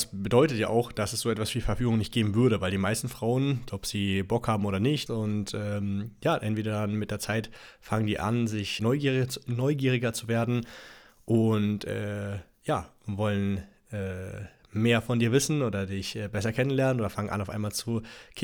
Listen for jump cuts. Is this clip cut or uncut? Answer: cut